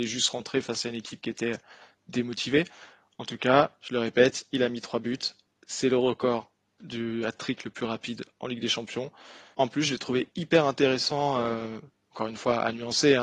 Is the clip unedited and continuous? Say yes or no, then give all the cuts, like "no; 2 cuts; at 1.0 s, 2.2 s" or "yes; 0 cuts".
no; 1 cut; at 9.5 s